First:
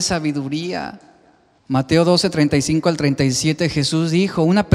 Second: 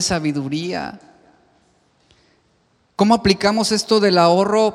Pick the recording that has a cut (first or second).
first